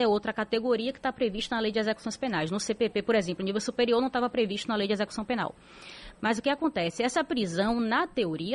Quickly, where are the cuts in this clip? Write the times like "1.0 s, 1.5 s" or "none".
none